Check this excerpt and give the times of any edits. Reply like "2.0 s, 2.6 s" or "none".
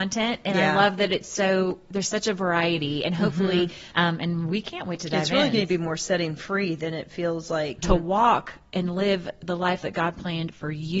3.9 s, 7.8 s